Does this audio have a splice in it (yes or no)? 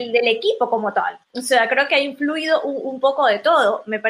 yes